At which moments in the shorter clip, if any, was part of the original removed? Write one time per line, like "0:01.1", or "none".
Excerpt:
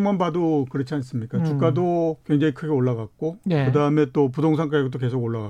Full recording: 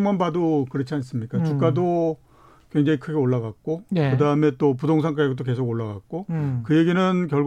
0:02.2